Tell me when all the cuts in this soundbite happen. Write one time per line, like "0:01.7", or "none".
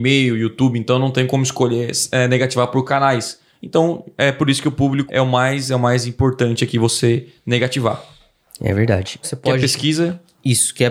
0:05.1
0:09.2